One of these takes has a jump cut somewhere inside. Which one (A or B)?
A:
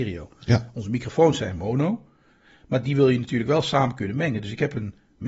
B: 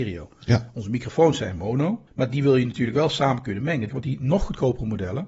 B